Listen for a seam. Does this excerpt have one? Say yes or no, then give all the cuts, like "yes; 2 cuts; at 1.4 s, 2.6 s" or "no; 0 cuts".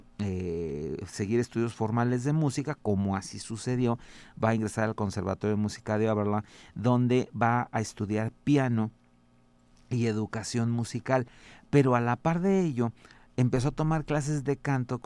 no; 0 cuts